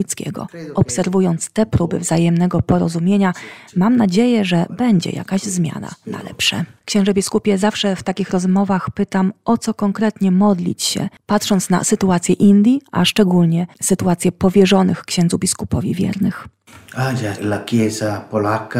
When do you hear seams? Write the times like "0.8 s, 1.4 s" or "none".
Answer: 6.8 s, 17.4 s